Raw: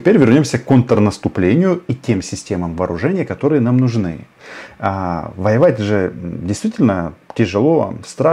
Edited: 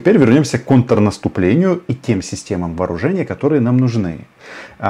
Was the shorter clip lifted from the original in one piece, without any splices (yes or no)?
yes